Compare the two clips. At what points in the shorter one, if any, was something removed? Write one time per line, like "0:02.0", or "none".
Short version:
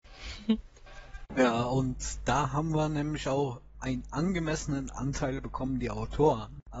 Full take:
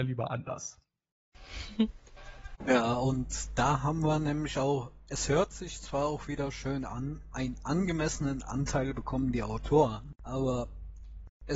0:03.7